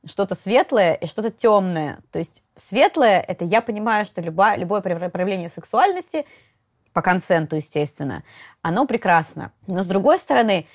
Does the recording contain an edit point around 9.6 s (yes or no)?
yes